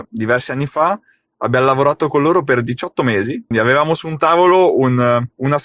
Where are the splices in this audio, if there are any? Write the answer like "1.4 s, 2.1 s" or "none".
3.5 s

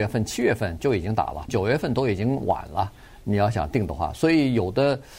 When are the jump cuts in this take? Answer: 1.5 s

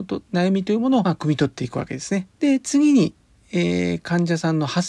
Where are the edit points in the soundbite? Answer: 1.0 s, 2.3 s

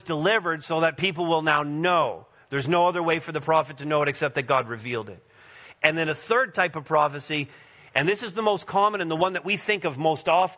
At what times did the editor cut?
none

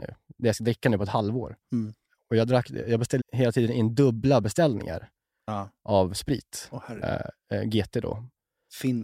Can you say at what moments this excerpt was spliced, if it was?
3.2 s, 7.0 s

